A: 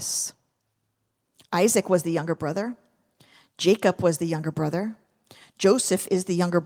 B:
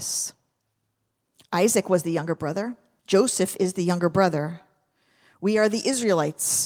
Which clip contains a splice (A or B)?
B